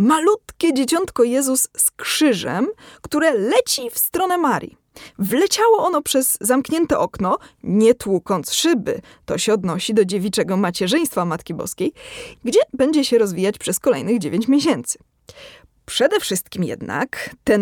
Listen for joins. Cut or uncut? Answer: cut